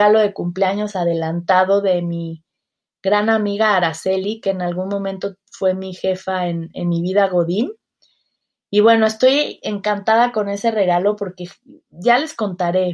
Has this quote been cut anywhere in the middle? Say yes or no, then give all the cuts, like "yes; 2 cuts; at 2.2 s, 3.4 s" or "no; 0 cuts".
no; 0 cuts